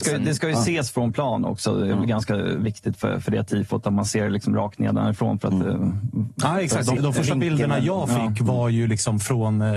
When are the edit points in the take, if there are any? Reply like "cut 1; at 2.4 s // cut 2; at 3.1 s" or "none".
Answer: cut 1; at 7.0 s